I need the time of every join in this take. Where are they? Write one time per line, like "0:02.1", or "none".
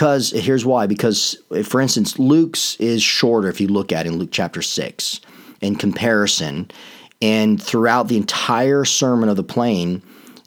none